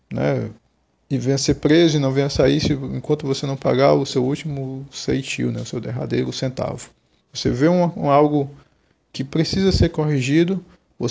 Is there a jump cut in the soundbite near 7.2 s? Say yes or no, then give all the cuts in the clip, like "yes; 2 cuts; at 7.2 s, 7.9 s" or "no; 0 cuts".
yes; 2 cuts; at 1.0 s, 7.2 s